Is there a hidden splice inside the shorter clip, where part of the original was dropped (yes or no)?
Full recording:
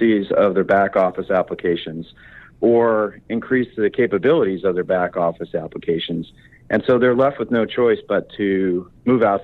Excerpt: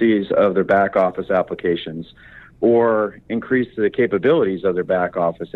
no